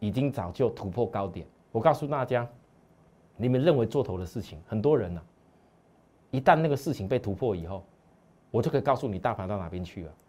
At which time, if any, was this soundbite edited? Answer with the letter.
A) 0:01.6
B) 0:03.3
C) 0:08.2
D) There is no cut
A